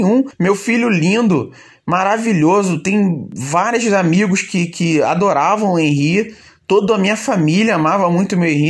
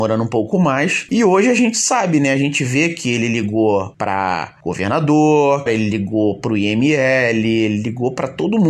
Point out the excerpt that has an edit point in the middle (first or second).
second